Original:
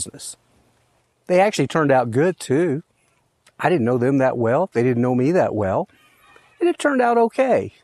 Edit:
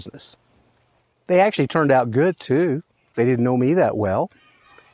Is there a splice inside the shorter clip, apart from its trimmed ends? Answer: yes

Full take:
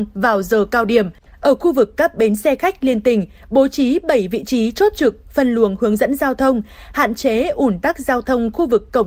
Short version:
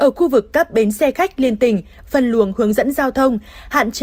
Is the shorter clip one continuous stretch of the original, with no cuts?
no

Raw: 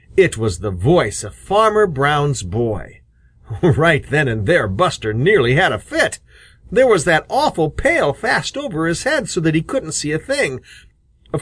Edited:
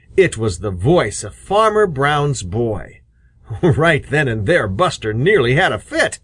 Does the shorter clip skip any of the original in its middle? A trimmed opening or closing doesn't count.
no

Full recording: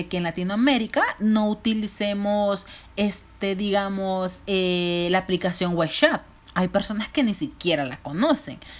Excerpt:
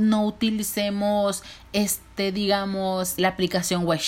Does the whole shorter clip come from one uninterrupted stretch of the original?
no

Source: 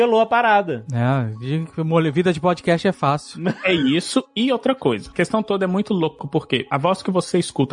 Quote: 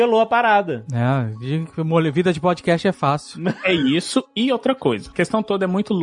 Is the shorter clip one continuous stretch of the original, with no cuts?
yes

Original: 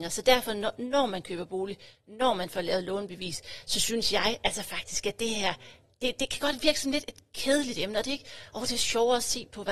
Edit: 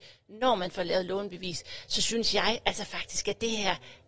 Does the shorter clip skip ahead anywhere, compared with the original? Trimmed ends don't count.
no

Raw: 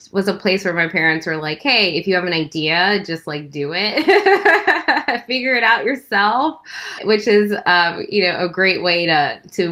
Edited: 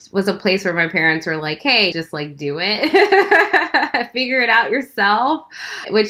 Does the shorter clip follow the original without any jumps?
no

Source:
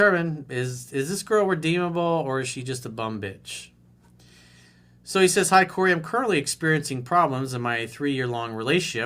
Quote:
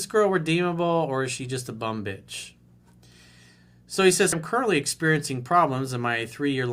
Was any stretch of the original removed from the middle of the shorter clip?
yes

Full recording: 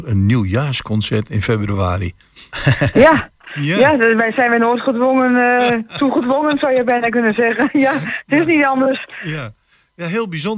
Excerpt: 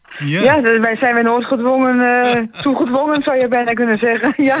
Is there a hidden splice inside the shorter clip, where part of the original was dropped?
no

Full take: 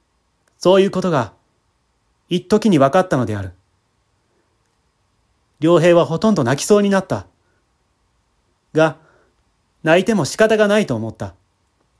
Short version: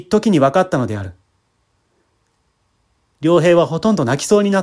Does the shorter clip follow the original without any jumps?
yes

